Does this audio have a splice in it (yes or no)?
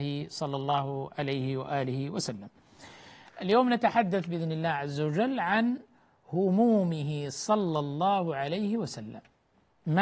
no